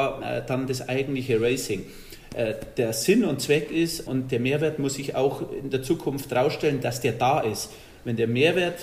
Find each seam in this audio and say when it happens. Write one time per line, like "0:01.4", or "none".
0:04.1